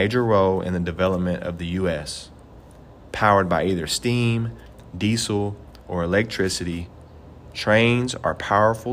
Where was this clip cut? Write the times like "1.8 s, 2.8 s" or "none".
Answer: none

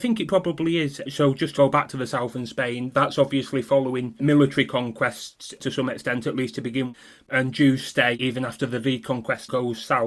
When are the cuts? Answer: none

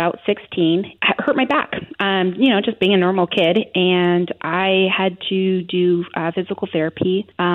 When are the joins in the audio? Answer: none

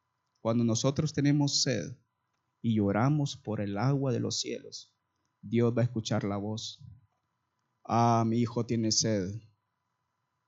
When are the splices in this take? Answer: none

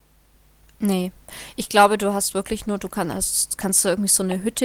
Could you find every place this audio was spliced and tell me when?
none

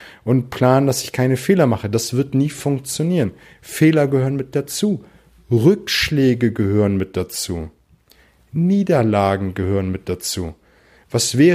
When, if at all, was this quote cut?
none

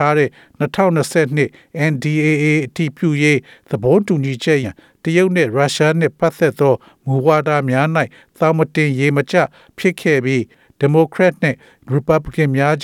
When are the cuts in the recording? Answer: 4.6 s

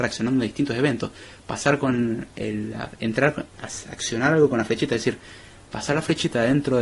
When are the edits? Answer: none

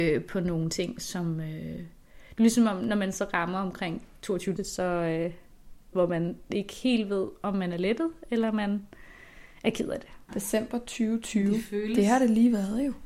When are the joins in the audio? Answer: 4.6 s, 5.9 s, 10.3 s

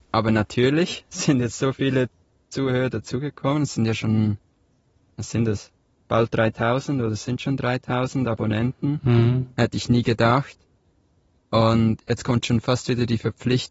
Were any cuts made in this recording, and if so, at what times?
none

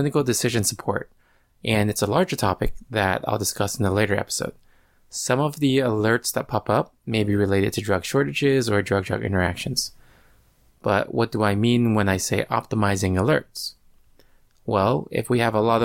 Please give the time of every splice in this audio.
none

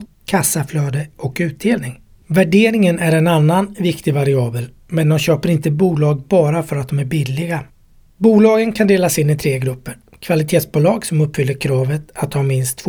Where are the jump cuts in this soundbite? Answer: none

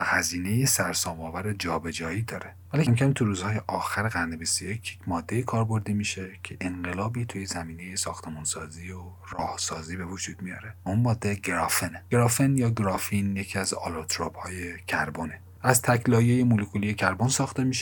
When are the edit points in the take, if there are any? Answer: 2.9 s

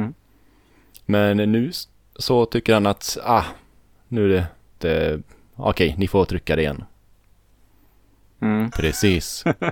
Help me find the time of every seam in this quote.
4.8 s, 8.7 s

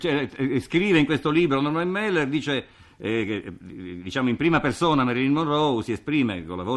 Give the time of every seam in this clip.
none

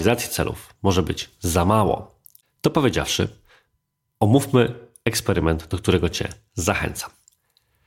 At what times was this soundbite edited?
2.4 s

